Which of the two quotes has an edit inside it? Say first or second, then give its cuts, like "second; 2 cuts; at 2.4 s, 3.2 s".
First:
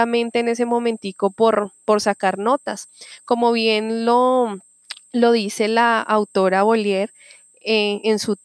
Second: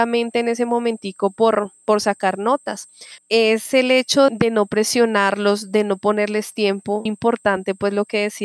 second; 3 cuts; at 3.2 s, 4.3 s, 7.1 s